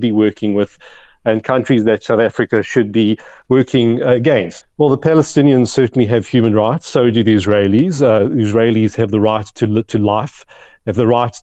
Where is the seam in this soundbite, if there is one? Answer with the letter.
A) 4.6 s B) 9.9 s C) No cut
A